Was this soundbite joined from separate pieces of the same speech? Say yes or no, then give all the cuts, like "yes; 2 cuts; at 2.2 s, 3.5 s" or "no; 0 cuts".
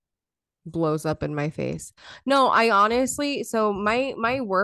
no; 0 cuts